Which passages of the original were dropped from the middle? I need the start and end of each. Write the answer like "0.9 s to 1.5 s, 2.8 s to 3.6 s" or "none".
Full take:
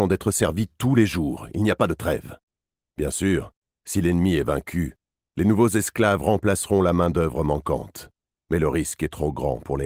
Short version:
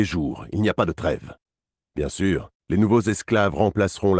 3.6 s to 5.3 s